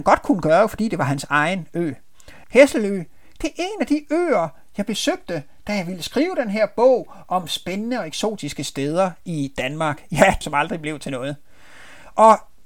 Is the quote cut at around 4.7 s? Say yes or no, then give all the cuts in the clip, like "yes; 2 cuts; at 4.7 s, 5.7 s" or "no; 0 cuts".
no; 2 cuts; at 2.4 s, 10.4 s